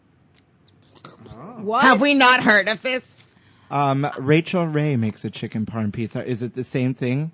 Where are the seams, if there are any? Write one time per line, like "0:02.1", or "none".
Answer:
none